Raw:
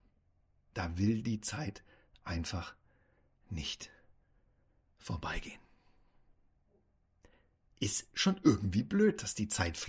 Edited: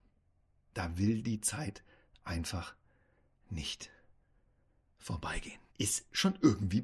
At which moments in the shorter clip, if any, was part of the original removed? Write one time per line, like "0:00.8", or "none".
0:05.7